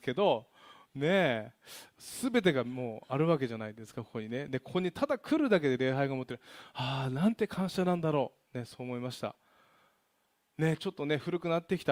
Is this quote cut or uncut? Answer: uncut